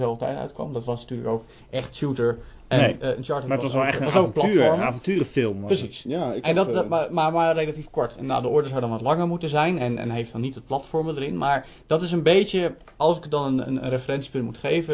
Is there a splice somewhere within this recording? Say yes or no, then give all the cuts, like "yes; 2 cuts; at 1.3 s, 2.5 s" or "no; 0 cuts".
no; 0 cuts